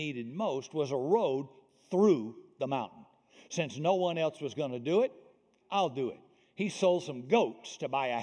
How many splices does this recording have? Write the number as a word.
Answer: one